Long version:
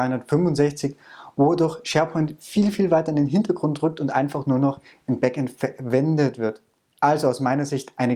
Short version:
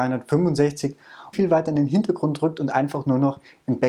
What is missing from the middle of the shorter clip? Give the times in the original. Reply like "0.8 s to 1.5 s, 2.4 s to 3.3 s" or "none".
1.3 s to 2.7 s